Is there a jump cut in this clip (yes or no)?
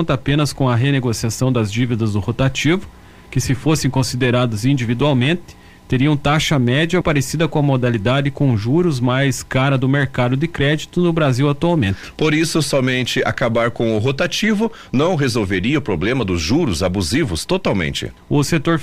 yes